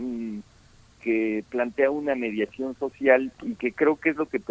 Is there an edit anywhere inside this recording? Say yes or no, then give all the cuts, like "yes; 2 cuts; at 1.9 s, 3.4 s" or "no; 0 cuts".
yes; 1 cut; at 0.9 s